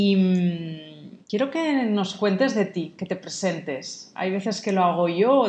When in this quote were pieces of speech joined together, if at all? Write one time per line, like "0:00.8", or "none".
0:01.2

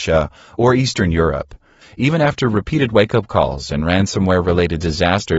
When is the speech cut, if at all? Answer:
0:01.8

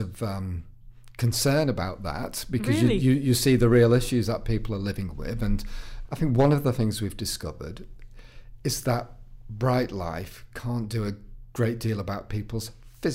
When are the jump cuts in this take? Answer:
0:06.1

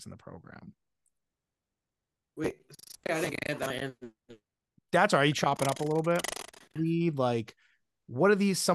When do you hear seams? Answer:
0:03.0
0:06.8

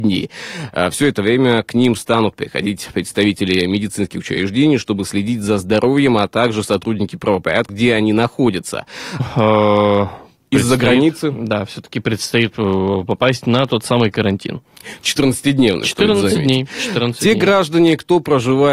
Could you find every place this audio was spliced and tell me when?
0:07.7
0:09.2

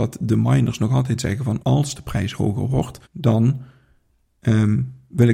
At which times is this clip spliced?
0:01.6
0:03.0

